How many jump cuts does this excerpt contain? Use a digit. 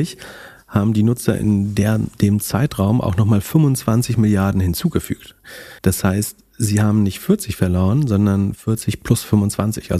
1